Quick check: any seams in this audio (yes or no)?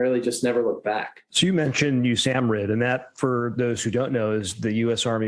no